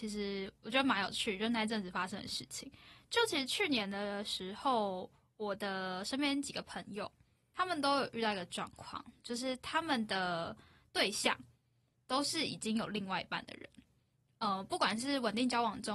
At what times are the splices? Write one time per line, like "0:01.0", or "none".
none